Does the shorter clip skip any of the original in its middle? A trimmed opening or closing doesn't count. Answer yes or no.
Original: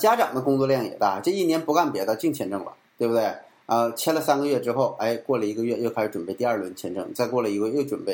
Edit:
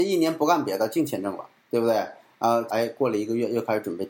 yes